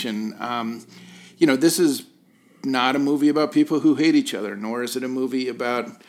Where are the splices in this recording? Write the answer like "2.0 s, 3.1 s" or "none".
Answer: none